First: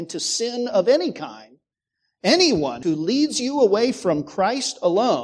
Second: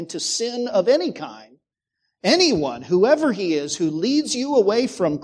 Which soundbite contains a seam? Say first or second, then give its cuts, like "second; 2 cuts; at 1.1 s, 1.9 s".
first; 1 cut; at 2.8 s